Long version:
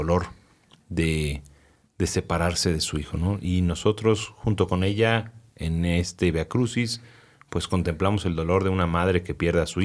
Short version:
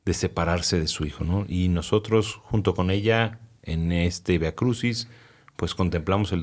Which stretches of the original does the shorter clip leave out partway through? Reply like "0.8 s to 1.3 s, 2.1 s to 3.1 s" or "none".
none